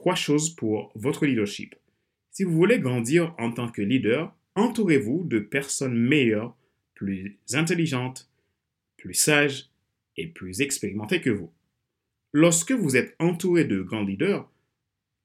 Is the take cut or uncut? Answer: cut